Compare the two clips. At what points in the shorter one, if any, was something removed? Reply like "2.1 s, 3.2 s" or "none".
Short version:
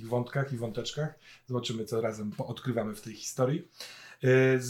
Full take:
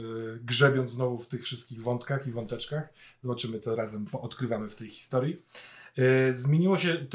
none